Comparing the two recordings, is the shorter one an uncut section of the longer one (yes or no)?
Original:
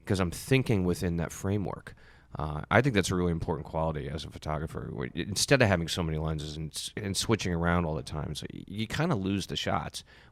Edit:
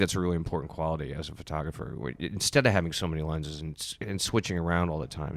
yes